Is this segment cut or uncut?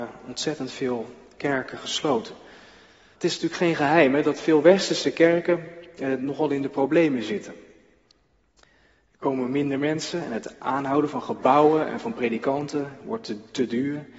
cut